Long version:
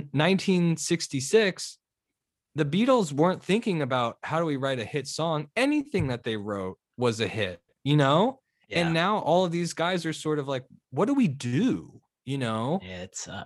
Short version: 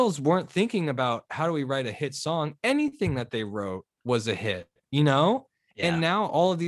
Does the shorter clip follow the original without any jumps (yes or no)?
yes